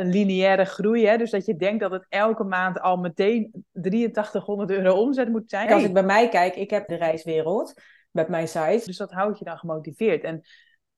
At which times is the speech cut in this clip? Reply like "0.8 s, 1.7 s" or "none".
5.7 s, 6.9 s, 8.9 s